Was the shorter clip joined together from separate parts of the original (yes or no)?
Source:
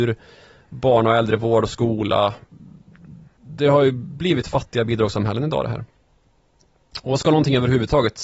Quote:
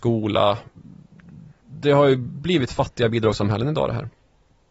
no